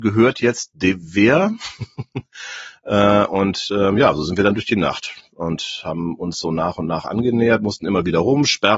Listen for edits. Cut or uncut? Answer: uncut